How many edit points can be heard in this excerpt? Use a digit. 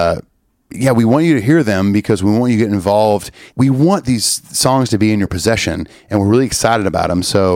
1